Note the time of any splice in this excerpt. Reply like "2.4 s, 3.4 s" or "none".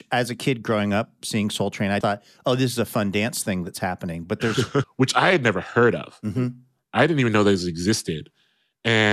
2.0 s, 4.8 s